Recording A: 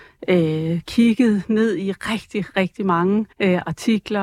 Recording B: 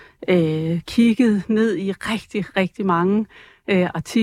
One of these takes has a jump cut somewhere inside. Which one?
A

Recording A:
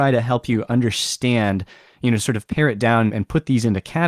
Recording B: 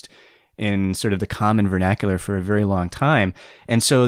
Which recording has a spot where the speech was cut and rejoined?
A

